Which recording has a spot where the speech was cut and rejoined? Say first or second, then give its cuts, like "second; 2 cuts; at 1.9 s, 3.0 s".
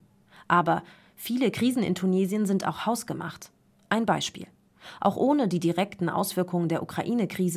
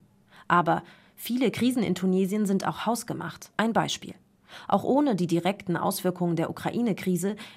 second; 1 cut; at 3.5 s